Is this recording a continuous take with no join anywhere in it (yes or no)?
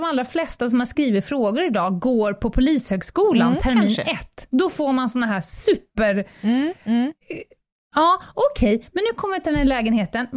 yes